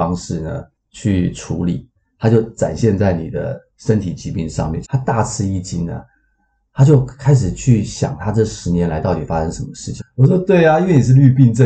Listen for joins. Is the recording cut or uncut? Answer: cut